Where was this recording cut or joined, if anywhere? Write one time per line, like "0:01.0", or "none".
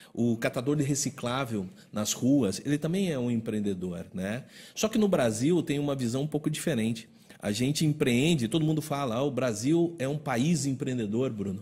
none

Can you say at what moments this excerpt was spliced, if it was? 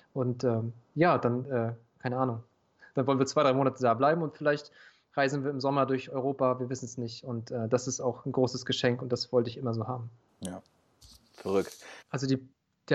0:12.0

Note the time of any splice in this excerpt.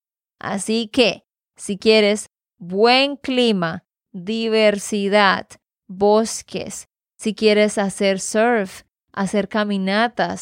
0:07.0
0:09.0

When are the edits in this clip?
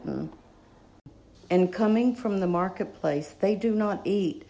0:01.3

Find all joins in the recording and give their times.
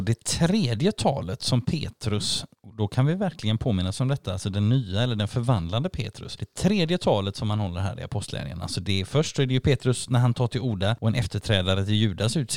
none

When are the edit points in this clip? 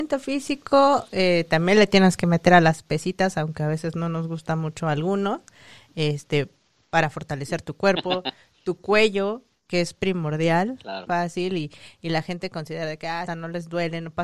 0:11.1
0:13.3

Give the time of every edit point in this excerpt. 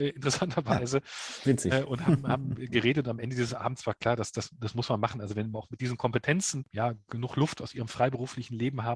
0:05.5
0:06.6

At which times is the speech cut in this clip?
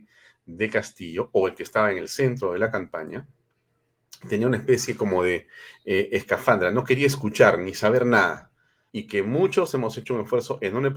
0:08.9

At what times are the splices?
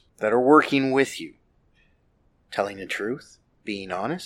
0:02.5

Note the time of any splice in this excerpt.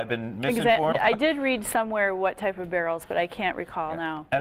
0:00.9

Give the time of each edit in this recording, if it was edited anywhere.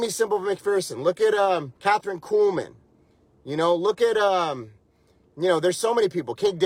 0:01.8

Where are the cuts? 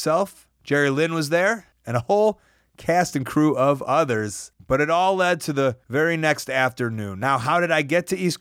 none

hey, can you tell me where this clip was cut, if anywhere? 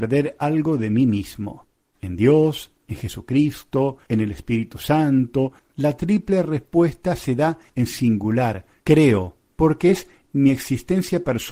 0:01.9
0:05.6

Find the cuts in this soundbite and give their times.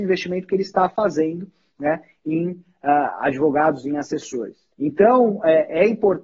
0:04.7

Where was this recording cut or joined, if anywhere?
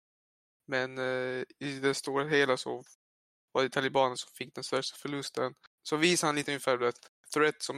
0:05.7

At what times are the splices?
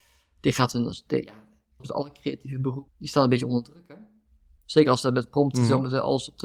0:01.8
0:04.6

